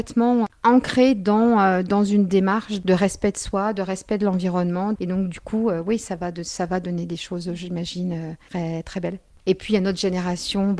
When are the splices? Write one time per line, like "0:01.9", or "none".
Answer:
0:05.0
0:09.4